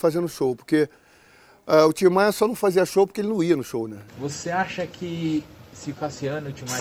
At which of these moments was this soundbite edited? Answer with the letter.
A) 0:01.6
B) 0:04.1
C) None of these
B